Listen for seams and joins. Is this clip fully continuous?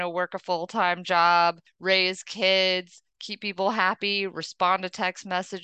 yes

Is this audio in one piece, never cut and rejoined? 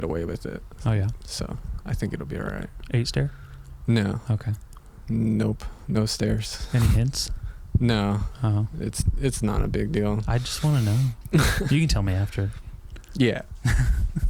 yes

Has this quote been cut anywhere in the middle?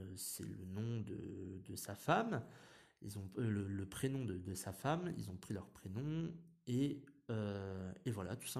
no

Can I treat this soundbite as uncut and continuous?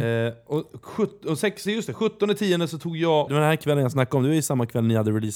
no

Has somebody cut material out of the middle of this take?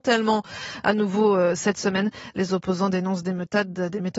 no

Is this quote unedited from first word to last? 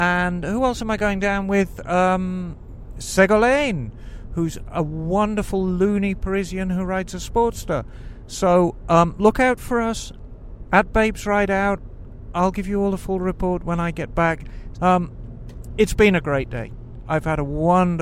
no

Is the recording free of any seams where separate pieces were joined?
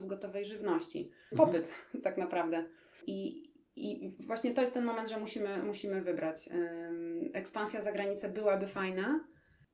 no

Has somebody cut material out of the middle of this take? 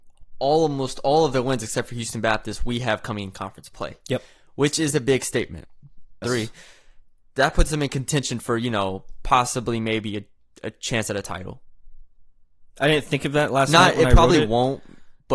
yes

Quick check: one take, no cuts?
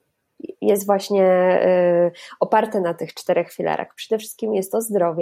yes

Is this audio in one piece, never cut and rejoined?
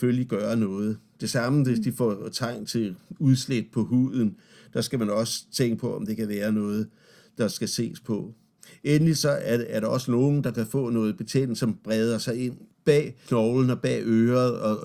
yes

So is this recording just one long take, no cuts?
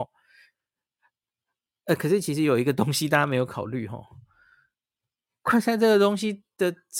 yes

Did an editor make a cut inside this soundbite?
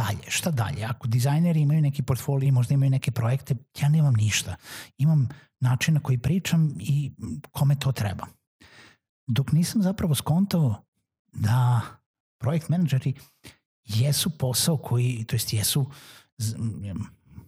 yes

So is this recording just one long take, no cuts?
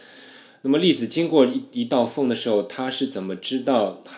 yes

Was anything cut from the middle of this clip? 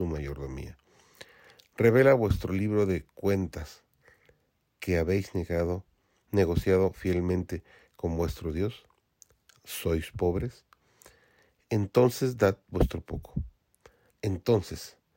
yes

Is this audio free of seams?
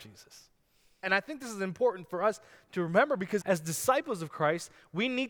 no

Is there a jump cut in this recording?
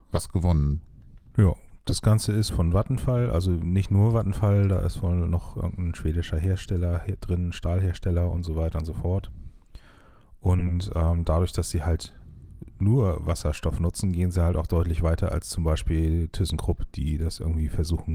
yes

